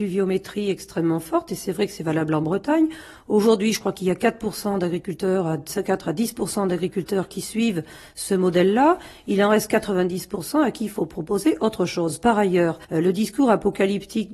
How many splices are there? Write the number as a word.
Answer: one